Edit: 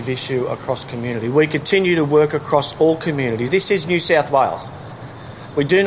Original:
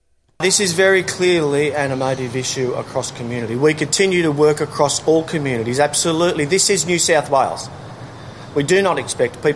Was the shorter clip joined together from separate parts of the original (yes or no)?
yes